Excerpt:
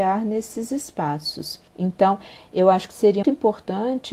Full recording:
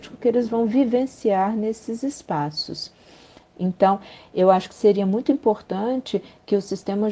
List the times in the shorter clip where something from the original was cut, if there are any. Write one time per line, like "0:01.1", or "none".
0:01.7
0:03.2